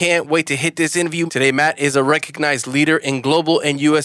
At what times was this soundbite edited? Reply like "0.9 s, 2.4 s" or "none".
1.3 s